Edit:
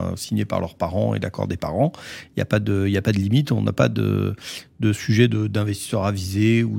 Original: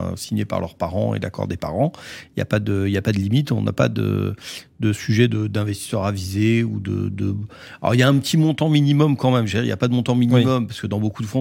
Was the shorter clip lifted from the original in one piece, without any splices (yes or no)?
yes